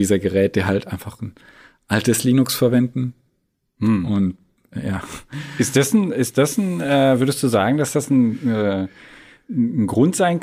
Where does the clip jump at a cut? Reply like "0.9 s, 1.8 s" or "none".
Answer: none